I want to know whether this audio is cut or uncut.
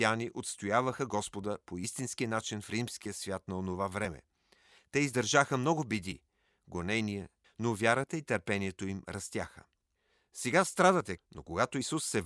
cut